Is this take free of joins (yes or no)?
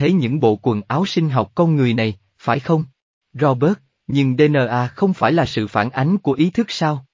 no